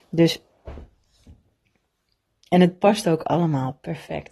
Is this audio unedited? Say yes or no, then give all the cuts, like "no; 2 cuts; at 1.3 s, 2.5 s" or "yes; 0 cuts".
yes; 0 cuts